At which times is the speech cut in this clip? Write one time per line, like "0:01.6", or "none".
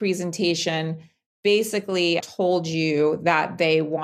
0:02.2